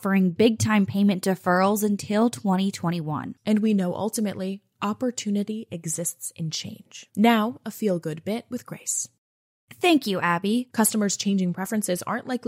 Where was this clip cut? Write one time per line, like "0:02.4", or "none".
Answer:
0:03.4
0:07.1
0:10.7